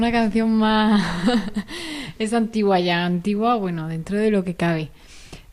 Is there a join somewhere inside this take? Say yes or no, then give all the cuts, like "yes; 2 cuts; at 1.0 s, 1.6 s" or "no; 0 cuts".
no; 0 cuts